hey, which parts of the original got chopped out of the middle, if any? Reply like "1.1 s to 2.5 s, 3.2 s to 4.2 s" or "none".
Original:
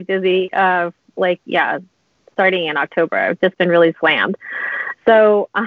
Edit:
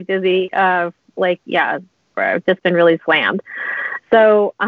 2.1 s to 3.1 s